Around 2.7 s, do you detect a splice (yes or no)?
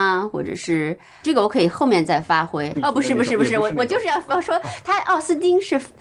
yes